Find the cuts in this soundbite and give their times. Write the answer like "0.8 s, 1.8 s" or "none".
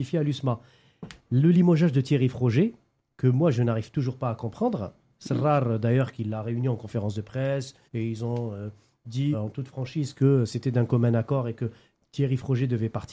7.8 s, 9.3 s